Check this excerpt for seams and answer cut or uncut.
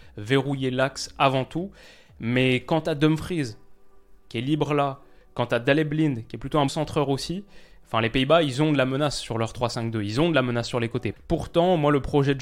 cut